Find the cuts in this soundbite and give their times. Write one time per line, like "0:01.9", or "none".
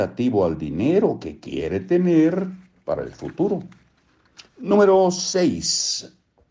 0:04.5